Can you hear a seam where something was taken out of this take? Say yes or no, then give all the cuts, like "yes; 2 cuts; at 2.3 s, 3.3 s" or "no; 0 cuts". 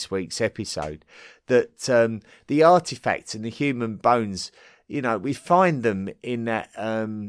no; 0 cuts